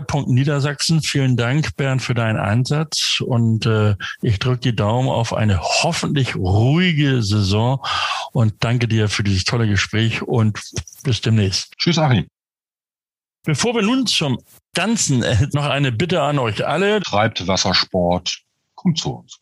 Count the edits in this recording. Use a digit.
3